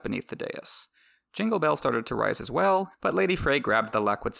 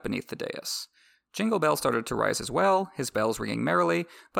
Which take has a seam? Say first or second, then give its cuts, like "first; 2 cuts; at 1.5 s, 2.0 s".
first; 1 cut; at 2.9 s